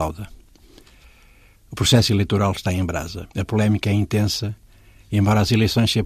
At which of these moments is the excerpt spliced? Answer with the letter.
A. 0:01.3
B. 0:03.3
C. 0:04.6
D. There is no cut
B